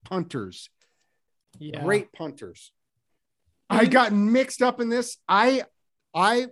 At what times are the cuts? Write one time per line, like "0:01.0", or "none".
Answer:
0:03.7